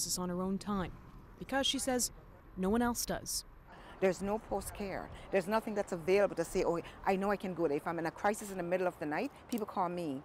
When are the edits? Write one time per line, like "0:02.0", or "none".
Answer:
none